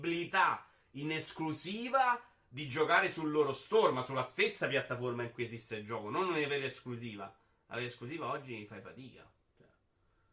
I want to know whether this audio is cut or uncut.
uncut